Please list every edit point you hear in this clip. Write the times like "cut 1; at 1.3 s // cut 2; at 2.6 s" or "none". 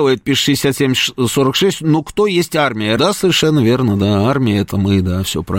cut 1; at 3.0 s